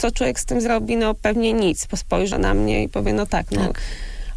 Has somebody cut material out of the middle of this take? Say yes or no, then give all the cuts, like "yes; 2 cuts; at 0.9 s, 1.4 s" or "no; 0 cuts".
yes; 1 cut; at 2.3 s